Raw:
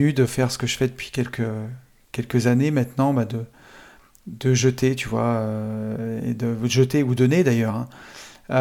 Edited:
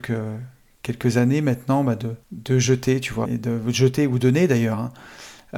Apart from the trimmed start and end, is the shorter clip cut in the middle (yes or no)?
yes